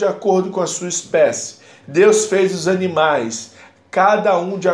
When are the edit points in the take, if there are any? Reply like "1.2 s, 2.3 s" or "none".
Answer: 1.8 s